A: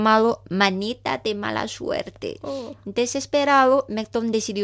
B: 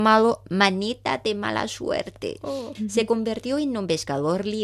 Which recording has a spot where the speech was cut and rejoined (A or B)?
B